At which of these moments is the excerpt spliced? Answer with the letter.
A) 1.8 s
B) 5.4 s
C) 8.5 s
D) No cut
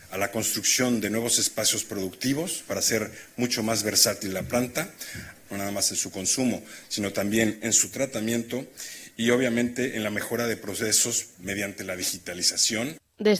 B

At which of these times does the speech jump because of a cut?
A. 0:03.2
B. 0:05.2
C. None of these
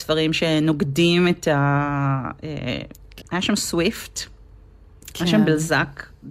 A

